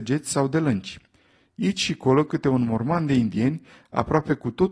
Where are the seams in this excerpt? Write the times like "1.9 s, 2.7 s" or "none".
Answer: none